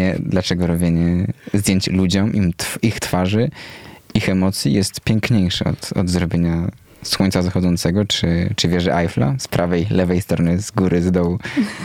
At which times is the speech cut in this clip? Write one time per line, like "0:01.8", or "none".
none